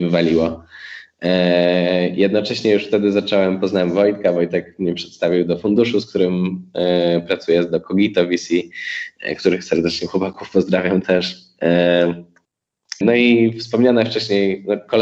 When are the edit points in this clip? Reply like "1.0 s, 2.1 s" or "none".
13.0 s